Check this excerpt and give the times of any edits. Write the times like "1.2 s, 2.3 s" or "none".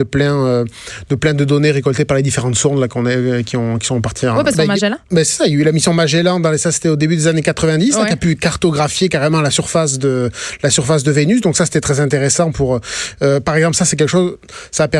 4.5 s